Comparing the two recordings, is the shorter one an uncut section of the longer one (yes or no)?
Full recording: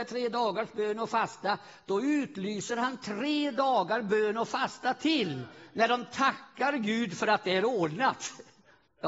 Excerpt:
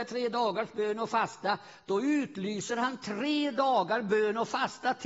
yes